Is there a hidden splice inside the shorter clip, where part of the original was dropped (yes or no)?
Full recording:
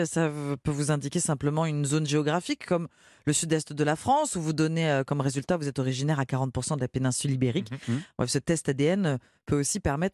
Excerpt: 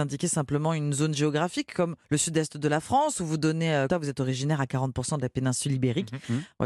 yes